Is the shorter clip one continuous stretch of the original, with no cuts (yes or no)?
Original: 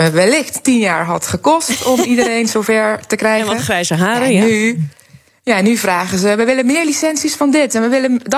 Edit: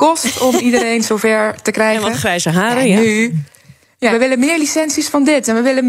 no